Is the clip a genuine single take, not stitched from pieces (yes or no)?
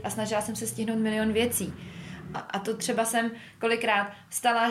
no